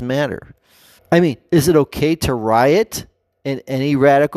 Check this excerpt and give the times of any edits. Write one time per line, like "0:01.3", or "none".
0:01.0